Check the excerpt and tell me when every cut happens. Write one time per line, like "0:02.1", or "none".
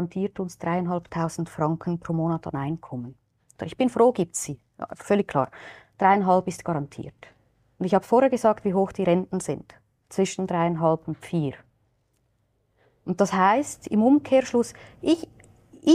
0:03.6